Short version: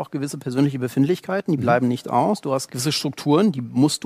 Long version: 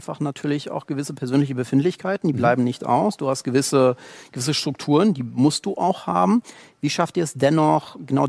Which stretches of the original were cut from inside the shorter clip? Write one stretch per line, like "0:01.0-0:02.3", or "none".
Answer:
0:03.4-0:04.3